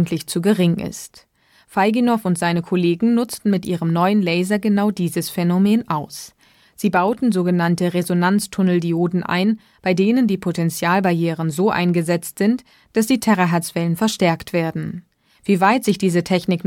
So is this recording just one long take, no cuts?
yes; 0 cuts

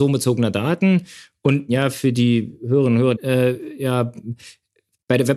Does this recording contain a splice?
yes; 1 cut; at 3.2 s

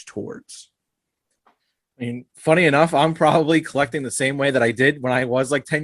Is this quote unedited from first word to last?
yes; 0 cuts

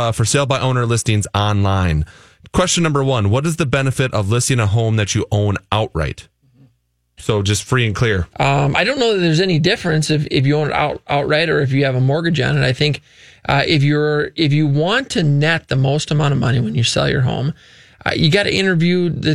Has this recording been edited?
yes; 2 cuts; at 7.2 s, 8.3 s

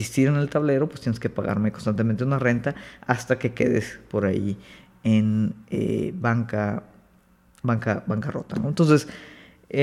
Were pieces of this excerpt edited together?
no; 0 cuts

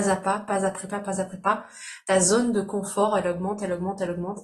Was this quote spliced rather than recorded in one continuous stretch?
no; 0 cuts

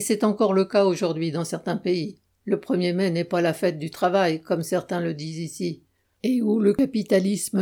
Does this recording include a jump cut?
yes; 1 cut; at 6.0 s

